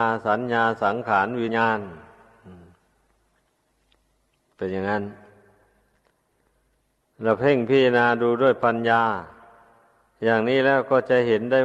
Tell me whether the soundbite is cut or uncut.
cut